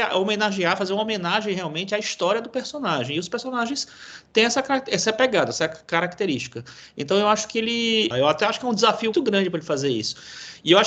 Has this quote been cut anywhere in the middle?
yes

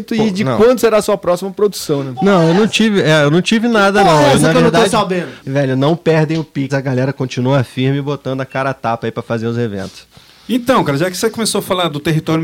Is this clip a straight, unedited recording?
no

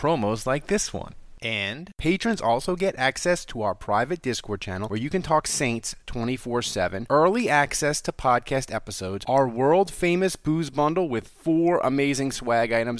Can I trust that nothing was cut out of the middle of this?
yes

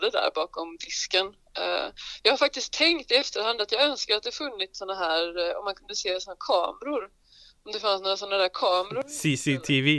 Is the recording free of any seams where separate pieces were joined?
yes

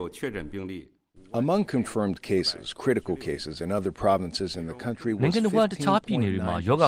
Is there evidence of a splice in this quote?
no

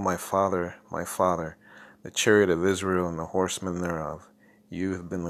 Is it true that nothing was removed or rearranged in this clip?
yes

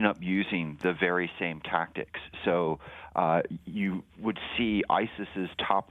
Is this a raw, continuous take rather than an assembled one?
yes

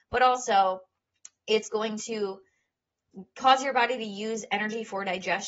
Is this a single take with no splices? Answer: yes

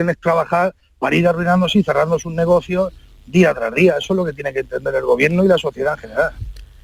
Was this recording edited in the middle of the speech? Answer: no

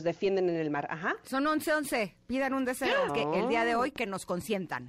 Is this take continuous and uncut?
no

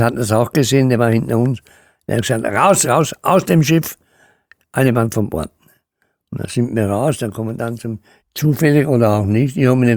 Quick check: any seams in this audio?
yes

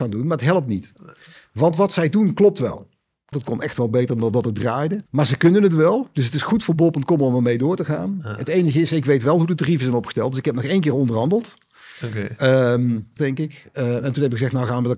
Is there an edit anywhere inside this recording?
yes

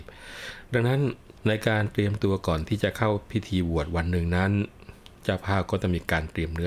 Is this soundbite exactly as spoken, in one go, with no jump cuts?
no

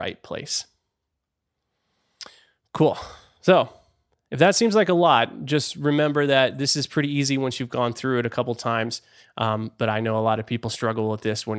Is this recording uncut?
yes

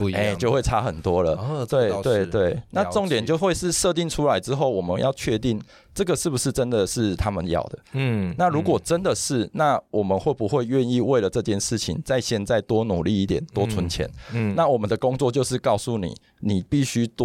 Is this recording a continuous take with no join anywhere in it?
yes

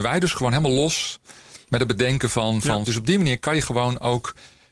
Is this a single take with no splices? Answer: no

